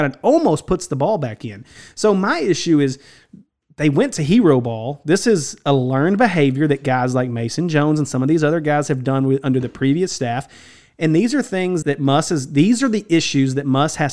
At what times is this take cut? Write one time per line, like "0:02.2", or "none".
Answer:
0:11.8